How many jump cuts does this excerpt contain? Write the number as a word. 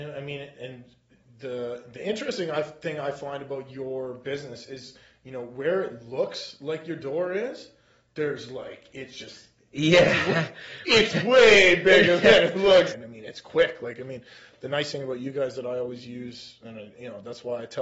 one